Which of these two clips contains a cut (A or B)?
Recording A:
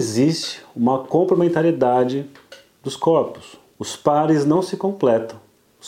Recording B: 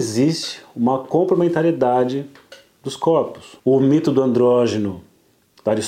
B